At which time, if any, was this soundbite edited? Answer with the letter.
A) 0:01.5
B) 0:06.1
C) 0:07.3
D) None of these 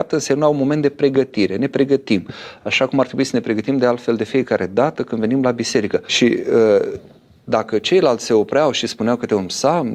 B